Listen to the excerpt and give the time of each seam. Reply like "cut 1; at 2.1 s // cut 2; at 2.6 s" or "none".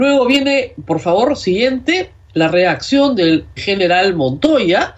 cut 1; at 3.6 s

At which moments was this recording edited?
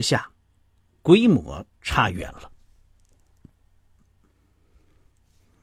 none

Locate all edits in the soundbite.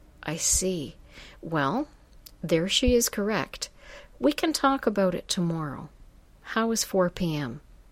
none

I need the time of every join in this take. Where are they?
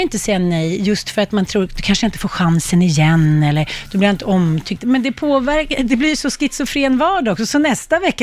cut 1; at 4.8 s

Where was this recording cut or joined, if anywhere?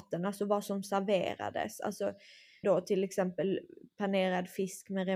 cut 1; at 2.6 s

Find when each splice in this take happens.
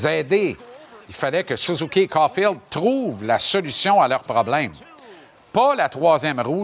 cut 1; at 1.0 s

